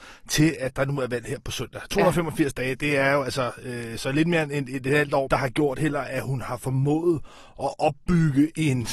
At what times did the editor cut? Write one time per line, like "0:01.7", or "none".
0:05.3